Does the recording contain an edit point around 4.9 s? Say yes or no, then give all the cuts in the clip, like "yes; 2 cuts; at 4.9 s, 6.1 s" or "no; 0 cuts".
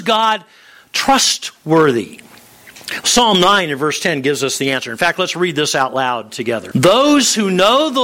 no; 1 cut; at 6.7 s